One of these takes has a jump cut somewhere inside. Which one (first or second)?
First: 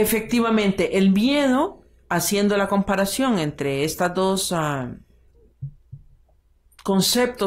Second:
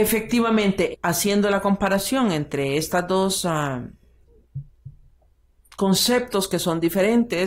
second